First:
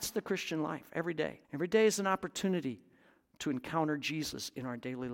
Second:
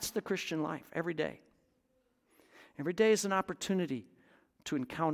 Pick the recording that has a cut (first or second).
first